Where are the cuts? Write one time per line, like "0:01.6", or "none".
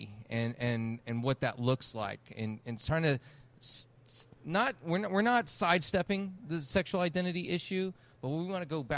none